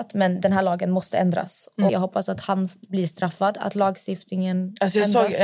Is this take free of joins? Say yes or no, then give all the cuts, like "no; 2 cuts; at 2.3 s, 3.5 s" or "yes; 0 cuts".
no; 1 cut; at 1.9 s